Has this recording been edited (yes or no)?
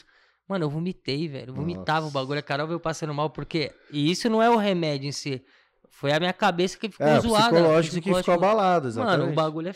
no